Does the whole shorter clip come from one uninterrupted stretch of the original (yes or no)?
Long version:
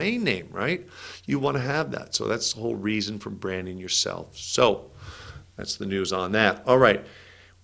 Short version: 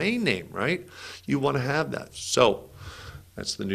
no